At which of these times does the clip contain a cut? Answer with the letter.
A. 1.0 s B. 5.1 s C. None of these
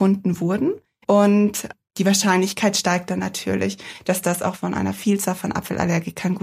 A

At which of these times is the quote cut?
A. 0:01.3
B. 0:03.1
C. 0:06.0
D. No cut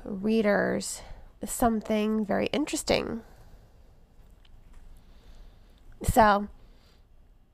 A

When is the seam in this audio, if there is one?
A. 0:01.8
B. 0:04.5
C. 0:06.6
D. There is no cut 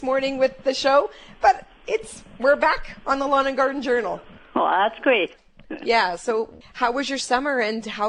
C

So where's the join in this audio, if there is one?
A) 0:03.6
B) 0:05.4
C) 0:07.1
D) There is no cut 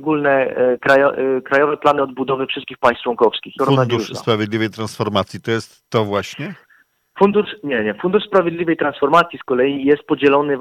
A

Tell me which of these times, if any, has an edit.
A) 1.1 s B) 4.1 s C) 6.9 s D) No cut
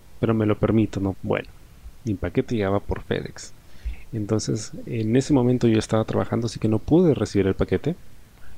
A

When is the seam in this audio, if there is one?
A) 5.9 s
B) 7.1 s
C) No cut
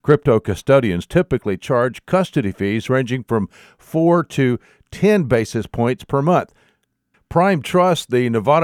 B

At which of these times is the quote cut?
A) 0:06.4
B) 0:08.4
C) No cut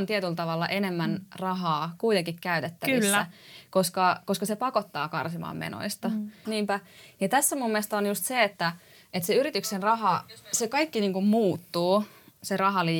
A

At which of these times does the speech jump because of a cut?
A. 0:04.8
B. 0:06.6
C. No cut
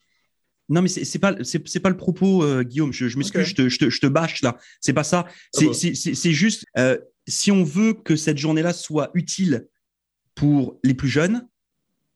B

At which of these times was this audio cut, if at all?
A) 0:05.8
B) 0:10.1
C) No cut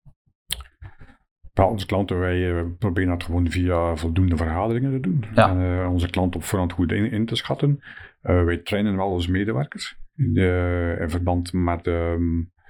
B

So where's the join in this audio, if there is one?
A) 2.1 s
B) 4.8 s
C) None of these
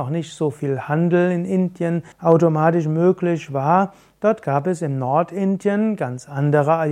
A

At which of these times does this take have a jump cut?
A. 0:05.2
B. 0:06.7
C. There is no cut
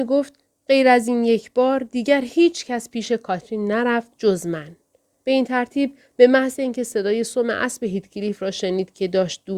A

